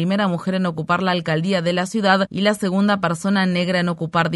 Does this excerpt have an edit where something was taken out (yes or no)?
no